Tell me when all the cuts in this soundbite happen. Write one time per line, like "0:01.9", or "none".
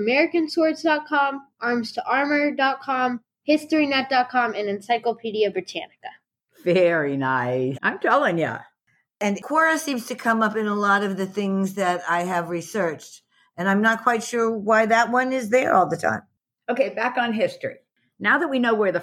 0:07.7